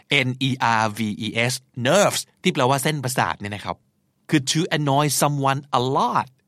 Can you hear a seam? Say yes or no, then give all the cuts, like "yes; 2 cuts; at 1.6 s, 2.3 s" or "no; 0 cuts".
no; 0 cuts